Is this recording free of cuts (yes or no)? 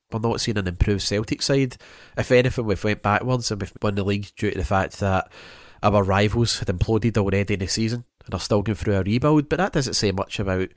no